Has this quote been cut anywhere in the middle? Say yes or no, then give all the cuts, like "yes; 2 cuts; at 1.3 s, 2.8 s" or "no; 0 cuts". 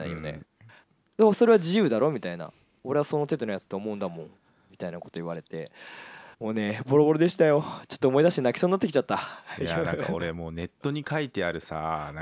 yes; 1 cut; at 6.3 s